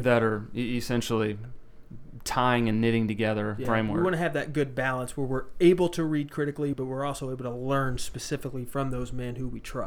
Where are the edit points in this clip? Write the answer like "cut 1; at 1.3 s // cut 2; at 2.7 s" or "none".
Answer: cut 1; at 3.6 s // cut 2; at 6.7 s